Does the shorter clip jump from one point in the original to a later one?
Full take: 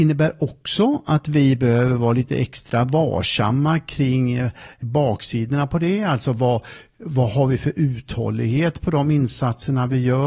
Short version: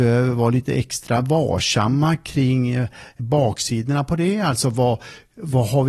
no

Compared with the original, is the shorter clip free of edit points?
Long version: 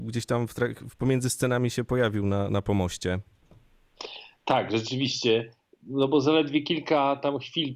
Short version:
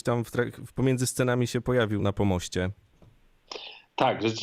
no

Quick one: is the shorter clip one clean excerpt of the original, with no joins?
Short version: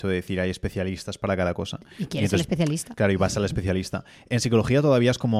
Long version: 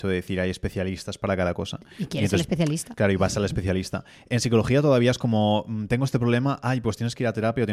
yes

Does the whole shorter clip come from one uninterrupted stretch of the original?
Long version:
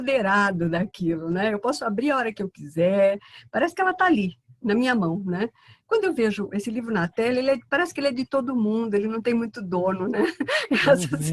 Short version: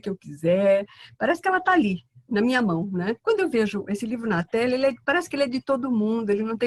no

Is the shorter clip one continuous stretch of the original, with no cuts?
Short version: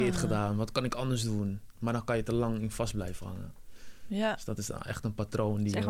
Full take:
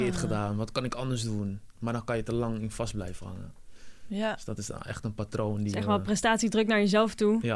yes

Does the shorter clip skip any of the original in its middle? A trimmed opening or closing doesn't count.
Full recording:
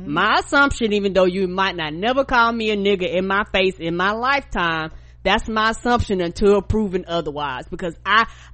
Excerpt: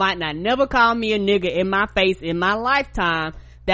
no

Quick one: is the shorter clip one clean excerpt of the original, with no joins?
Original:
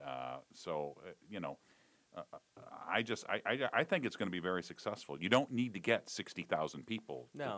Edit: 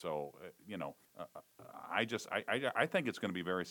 no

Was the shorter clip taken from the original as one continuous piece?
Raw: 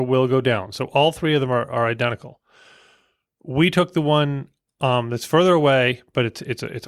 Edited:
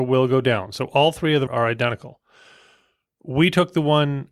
no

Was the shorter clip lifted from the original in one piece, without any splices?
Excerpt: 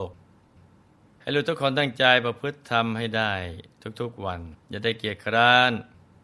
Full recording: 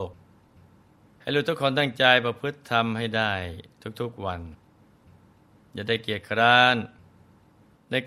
no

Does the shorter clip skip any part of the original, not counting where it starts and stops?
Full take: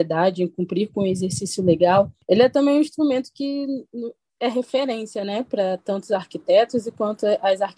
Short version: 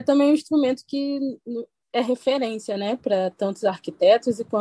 no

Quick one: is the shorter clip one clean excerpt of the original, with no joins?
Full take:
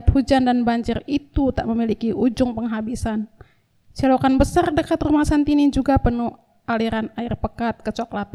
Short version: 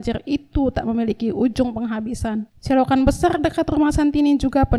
no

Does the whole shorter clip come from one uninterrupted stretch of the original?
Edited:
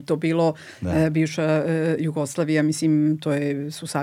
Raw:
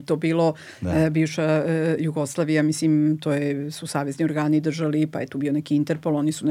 yes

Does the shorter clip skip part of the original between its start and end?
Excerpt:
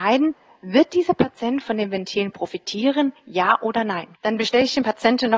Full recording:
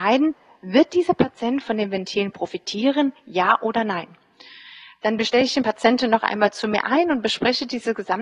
yes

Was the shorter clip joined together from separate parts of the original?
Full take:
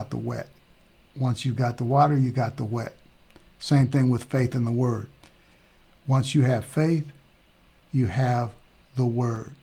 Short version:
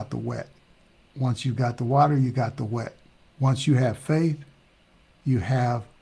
yes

